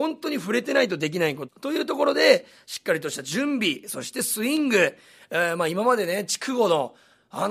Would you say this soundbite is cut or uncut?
cut